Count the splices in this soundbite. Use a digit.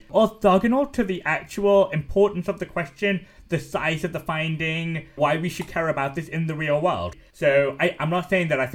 1